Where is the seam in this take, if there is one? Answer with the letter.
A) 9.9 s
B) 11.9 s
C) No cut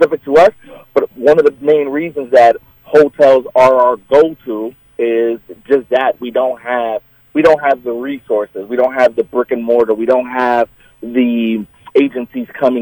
B